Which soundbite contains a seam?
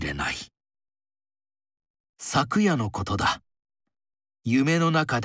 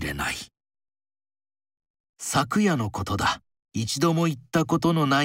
second; 1 cut; at 3.7 s

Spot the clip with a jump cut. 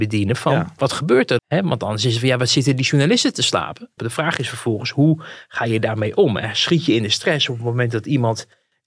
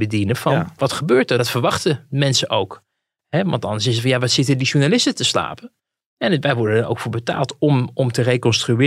first; 2 cuts; at 1.4 s, 4.0 s

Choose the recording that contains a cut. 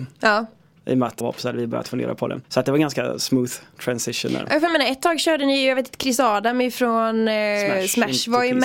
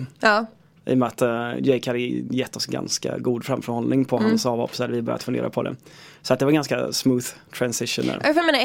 first; 2 cuts; at 1.2 s, 2.4 s

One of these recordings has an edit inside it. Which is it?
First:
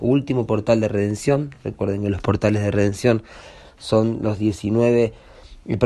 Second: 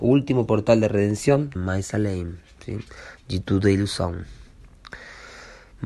second; 1 cut; at 1.6 s

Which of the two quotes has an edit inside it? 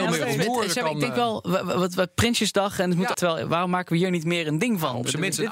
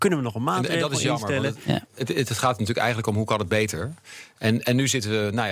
first; 1 cut; at 3.1 s

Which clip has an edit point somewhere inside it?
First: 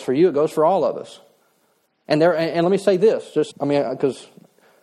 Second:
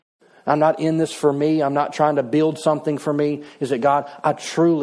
first; 1 cut; at 3.5 s

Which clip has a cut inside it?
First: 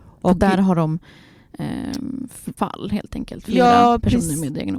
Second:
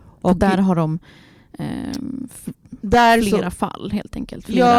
first; 1 cut; at 2.6 s

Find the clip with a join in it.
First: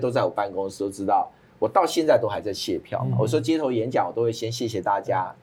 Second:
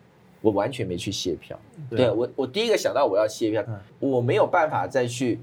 second; 2 cuts; at 1.9 s, 3.6 s

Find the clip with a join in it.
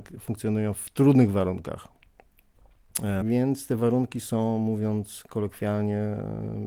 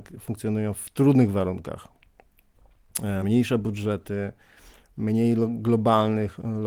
first; 1 cut; at 3.2 s

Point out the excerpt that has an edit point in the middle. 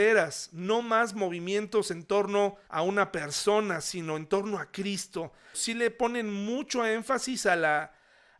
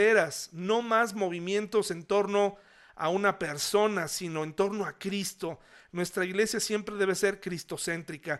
first; 2 cuts; at 2.6 s, 5.5 s

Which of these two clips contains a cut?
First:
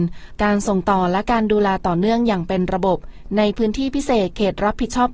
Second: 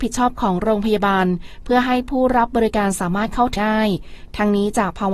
second; 1 cut; at 3.6 s

